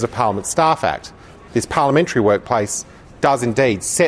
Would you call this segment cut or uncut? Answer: cut